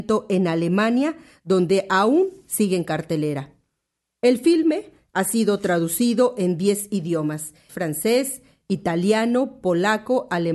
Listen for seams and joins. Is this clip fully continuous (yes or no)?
no